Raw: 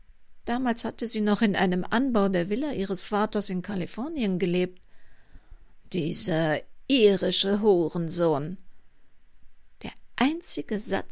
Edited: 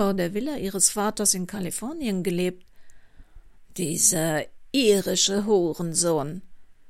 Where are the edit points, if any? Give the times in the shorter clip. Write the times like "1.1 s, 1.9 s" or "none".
none